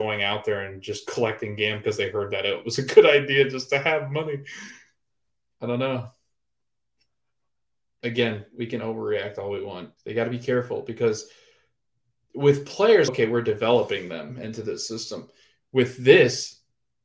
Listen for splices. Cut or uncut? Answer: cut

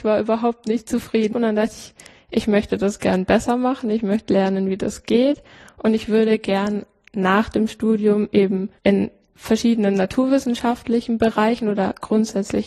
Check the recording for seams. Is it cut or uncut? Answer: cut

